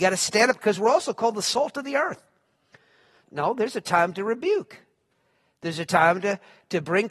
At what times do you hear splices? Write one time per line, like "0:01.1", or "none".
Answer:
0:03.2